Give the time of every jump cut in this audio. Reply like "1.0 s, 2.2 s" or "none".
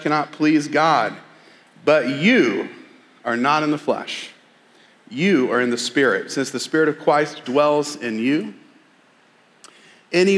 7.4 s